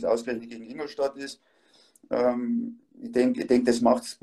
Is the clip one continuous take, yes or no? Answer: no